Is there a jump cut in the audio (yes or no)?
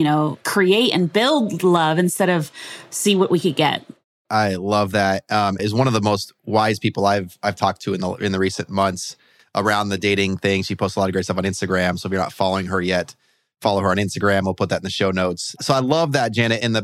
yes